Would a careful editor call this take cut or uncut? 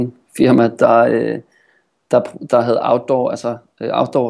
uncut